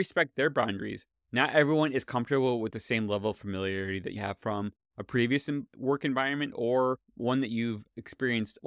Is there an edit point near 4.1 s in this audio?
yes; 2 cuts; at 4.1 s, 7.1 s

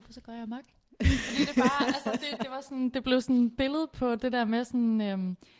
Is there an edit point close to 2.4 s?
yes; 1 cut; at 2.4 s

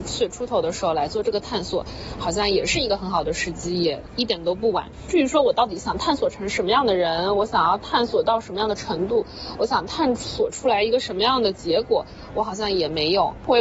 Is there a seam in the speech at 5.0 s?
no; 0 cuts

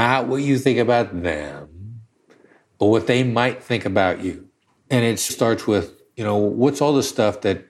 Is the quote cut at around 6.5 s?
no; 1 cut; at 5.3 s

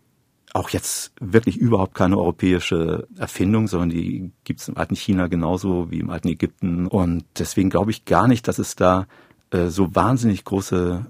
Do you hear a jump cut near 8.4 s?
no; 1 cut; at 6.9 s

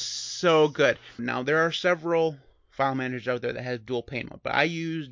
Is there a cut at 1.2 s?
yes; 1 cut; at 1.2 s

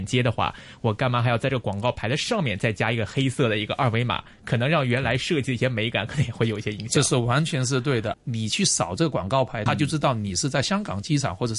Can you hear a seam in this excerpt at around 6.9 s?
no; 2 cuts; at 8.1 s, 9.7 s

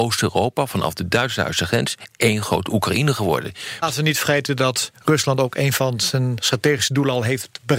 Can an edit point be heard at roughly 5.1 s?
no; 1 cut; at 3.8 s

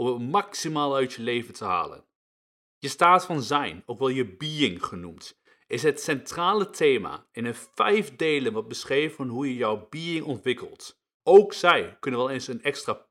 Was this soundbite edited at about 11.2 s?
yes; 1 cut; at 11.2 s

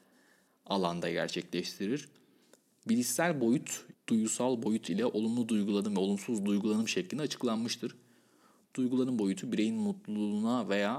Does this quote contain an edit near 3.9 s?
yes; 1 cut; at 3.9 s

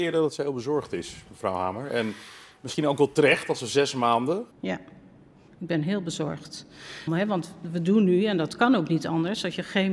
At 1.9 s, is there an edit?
no; 2 cuts; at 4.5 s, 7.1 s

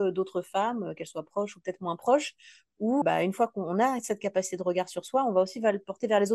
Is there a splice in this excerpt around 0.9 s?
no; 1 cut; at 3.0 s

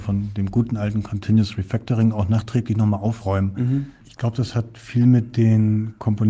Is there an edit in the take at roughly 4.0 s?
yes; 1 cut; at 4.0 s

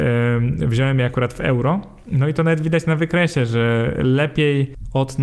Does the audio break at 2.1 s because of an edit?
no; 0 cuts

